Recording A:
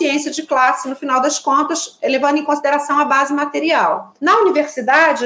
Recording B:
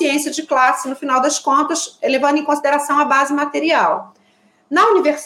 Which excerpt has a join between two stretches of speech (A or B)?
A